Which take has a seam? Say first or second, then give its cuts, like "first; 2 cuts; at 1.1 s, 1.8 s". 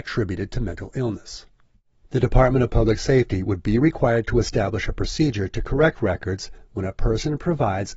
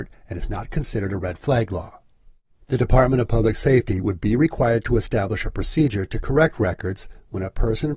first; 1 cut; at 2.0 s